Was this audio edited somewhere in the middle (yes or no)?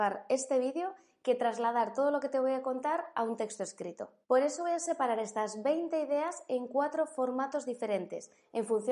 no